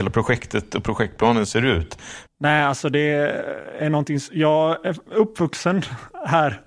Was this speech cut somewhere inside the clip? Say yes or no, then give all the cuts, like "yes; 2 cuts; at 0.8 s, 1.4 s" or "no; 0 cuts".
yes; 1 cut; at 2.3 s